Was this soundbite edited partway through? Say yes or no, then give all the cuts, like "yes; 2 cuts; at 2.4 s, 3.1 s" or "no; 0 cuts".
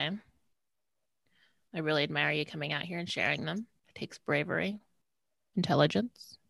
no; 0 cuts